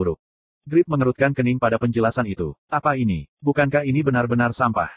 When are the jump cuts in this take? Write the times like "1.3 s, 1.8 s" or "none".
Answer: 2.6 s